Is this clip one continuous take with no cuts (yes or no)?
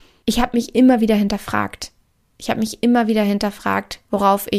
yes